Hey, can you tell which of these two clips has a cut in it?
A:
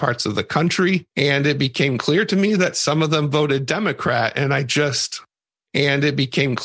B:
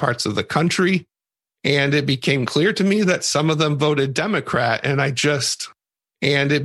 A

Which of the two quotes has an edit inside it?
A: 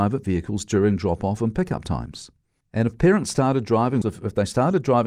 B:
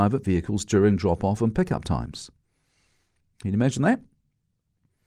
A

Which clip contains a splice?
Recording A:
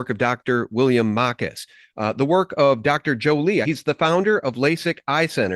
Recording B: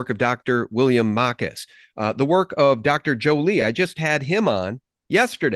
A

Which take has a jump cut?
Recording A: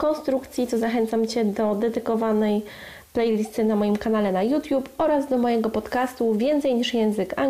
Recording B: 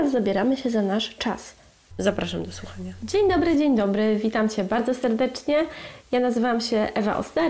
B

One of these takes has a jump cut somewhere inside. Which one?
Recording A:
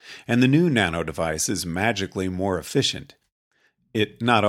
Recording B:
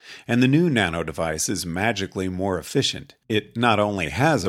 B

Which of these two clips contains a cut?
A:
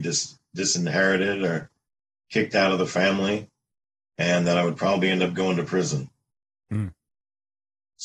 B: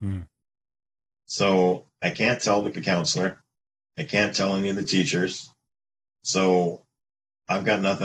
B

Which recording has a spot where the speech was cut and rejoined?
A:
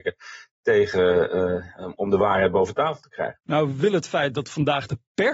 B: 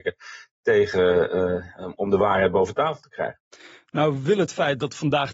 A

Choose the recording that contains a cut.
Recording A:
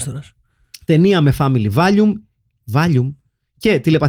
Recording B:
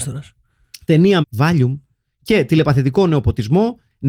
B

